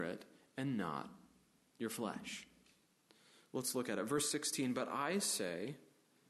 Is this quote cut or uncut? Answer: uncut